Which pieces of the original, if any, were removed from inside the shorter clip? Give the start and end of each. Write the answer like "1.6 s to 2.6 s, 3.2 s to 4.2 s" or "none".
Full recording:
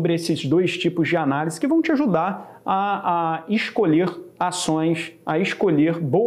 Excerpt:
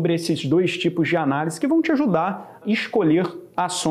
2.6 s to 3.4 s